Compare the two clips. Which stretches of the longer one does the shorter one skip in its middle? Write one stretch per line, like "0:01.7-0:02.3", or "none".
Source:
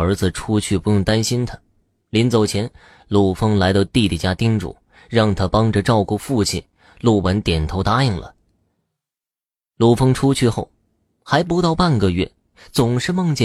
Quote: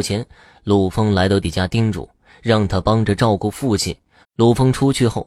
0:03.9-0:04.1
0:06.9-0:09.6